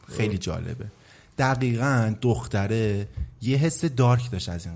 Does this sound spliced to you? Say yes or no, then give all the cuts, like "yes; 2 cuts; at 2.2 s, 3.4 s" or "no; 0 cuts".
no; 0 cuts